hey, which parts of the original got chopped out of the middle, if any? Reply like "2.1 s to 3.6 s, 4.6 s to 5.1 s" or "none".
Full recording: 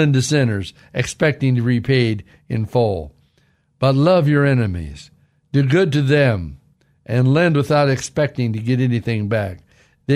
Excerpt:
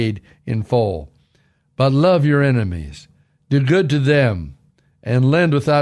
none